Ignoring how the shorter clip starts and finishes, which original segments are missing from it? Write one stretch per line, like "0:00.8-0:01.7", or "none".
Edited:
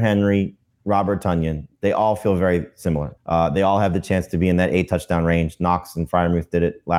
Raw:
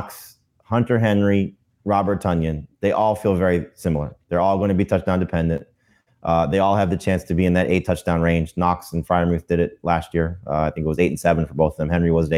0:04.2-0:06.1